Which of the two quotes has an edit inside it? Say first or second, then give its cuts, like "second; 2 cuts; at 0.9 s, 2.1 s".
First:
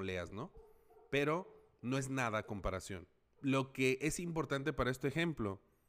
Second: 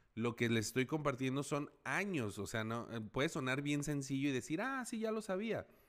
first; 1 cut; at 3.4 s